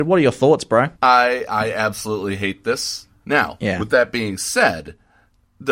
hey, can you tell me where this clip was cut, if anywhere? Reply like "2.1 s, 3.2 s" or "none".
0.9 s, 3.2 s